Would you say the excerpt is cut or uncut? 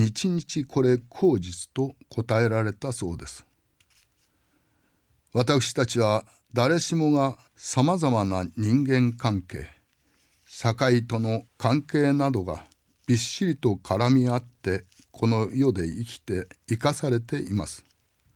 cut